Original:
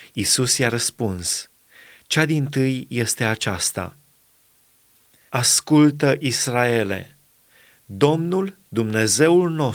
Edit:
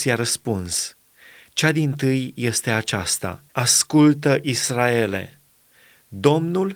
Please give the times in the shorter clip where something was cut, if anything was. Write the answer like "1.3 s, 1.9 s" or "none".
3.5 s